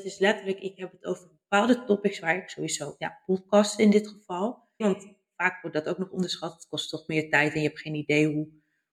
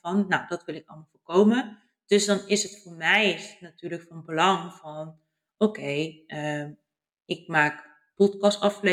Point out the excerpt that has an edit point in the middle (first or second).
first